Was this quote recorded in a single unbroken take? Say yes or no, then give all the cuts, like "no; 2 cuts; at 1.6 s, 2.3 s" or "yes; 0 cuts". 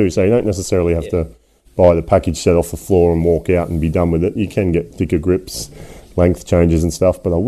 yes; 0 cuts